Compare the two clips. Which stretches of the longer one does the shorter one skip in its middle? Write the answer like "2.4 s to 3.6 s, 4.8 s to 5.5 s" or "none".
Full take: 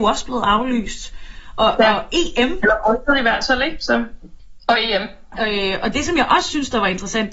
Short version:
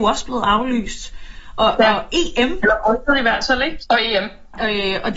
3.8 s to 4.6 s